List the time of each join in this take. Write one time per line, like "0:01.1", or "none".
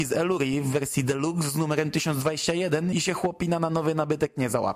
0:02.9